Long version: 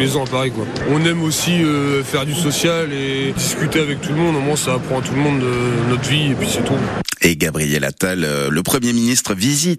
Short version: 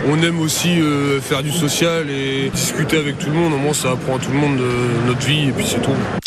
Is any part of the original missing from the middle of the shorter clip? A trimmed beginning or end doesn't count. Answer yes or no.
no